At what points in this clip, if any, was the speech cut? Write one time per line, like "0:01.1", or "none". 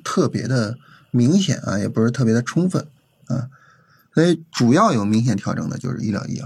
none

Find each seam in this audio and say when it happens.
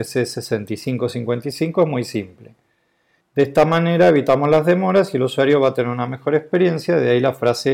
0:03.2

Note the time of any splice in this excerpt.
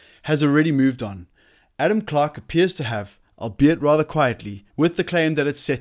0:04.7

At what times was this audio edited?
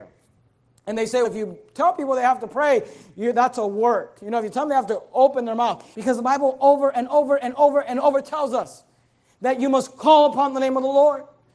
0:01.2
0:05.9

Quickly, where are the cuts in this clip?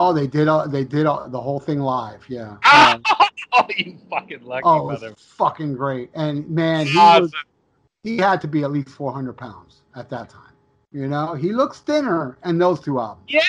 0:01.2
0:10.8

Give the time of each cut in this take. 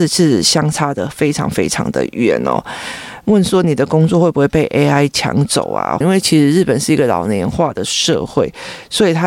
0:06.0

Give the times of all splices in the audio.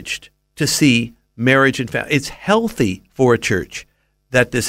none

